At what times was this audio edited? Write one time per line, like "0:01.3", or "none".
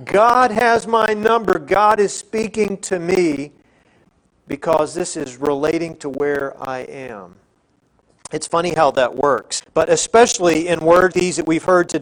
0:09.6
0:11.1